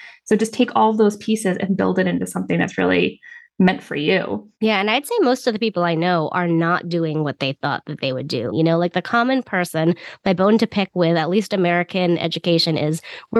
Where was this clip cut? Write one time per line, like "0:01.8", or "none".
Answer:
0:04.6
0:08.5